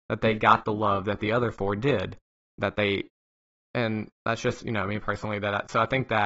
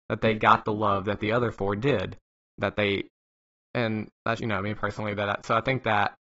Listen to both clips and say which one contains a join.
second; 1 cut; at 4.4 s

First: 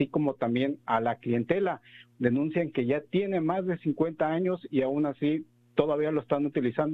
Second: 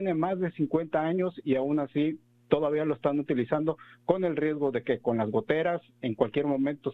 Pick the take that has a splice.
first; 1 cut; at 2.1 s

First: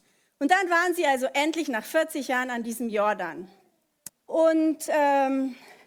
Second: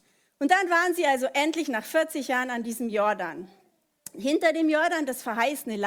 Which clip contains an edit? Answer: first; 1 cut; at 4.1 s

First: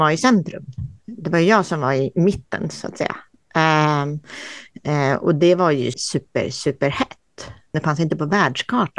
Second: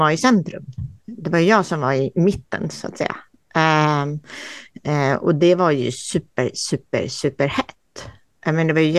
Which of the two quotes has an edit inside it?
first; 2 cuts; at 5.9 s, 7.7 s

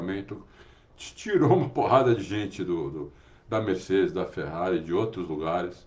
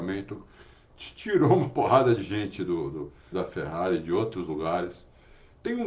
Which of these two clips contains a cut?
second; 1 cut; at 3.3 s

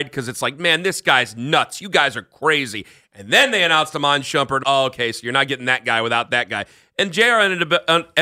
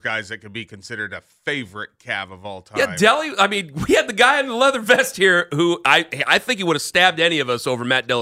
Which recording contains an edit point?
first; 1 cut; at 4.6 s

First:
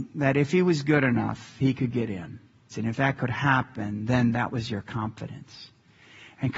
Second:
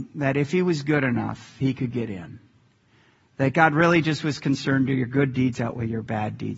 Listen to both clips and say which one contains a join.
first; 1 cut; at 2.7 s

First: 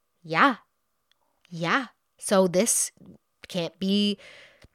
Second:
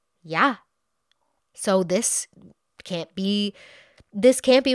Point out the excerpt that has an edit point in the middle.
second; 1 cut; at 1.4 s

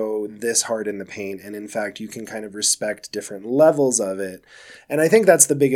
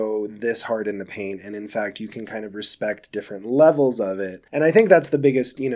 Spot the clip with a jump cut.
second; 1 cut; at 4.5 s

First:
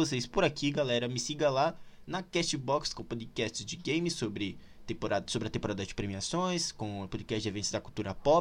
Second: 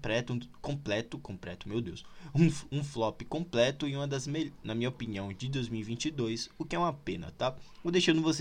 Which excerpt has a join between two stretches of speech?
second; 1 cut; at 4.6 s

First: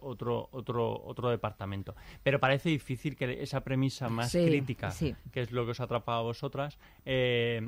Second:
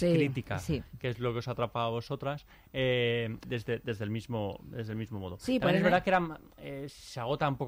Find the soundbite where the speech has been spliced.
second; 1 cut; at 3.4 s

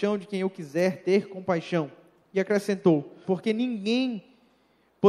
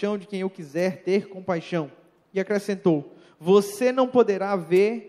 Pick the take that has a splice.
first; 1 cut; at 3.2 s

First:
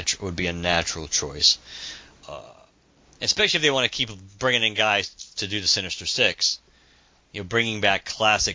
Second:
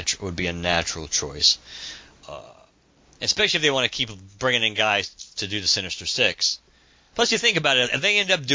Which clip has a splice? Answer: second; 1 cut; at 7.1 s

